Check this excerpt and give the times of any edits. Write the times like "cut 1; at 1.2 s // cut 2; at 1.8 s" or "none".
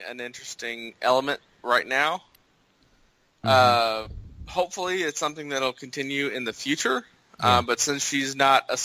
none